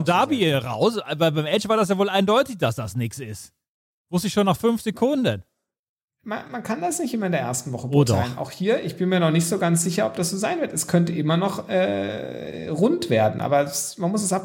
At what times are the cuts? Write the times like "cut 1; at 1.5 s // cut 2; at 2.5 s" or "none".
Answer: none

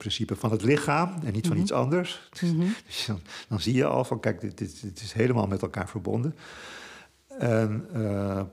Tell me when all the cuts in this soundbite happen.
none

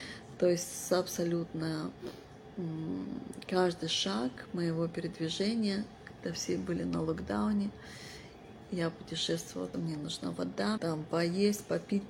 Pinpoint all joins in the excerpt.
cut 1; at 9.7 s // cut 2; at 10.8 s

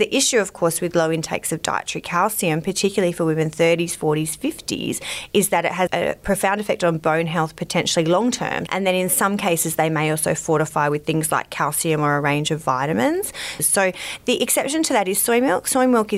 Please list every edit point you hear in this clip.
cut 1; at 5.9 s // cut 2; at 8.7 s // cut 3; at 13.6 s

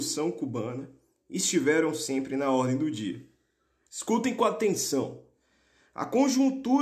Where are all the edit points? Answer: cut 1; at 3.8 s

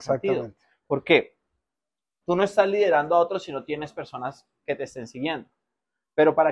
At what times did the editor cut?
cut 1; at 2.2 s

